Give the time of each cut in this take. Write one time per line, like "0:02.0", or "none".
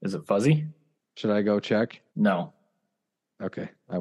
0:01.0
0:02.1

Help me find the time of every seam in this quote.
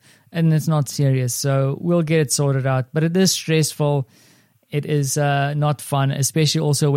none

